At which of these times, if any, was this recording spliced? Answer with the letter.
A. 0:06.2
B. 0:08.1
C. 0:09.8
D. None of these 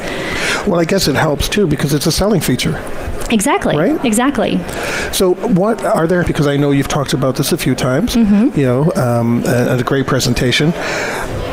A